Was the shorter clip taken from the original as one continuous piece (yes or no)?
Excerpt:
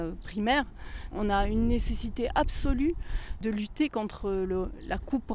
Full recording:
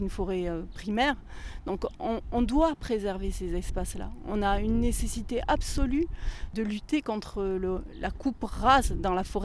no